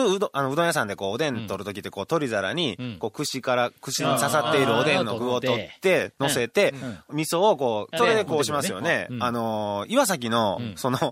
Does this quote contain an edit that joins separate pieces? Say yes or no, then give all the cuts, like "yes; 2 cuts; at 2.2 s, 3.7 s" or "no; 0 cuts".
yes; 1 cut; at 8.0 s